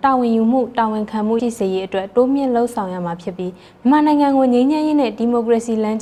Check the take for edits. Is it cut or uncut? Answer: cut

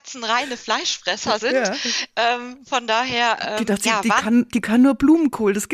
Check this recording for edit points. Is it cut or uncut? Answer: uncut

